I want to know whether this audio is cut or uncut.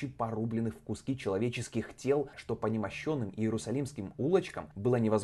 cut